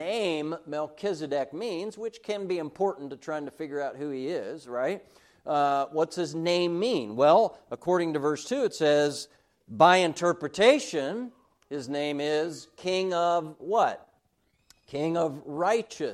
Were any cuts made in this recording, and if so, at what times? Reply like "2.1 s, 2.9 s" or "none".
none